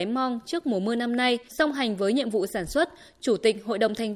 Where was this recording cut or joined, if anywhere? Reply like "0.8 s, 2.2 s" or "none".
1.5 s